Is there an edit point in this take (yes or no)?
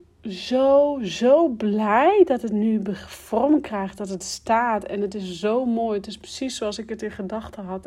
no